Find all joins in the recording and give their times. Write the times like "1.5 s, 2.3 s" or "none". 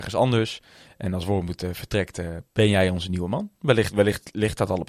none